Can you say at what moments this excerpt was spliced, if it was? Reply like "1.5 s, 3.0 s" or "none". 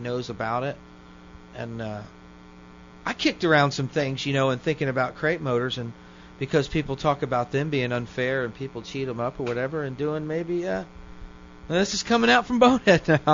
none